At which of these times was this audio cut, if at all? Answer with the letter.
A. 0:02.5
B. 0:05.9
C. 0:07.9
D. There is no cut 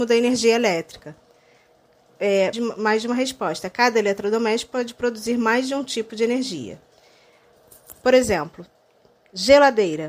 A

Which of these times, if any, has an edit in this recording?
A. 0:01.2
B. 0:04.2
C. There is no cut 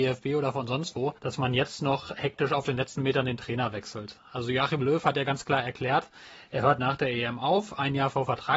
A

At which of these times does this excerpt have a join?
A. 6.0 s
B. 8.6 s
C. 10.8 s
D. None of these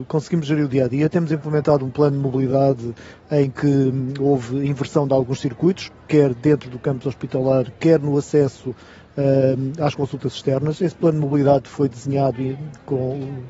D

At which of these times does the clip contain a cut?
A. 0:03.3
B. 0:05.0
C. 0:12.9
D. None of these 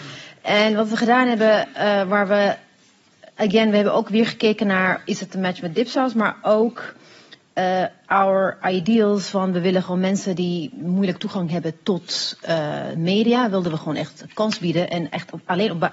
D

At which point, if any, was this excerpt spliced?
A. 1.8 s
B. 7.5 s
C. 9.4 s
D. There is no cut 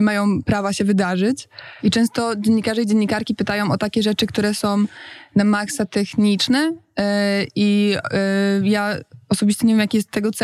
A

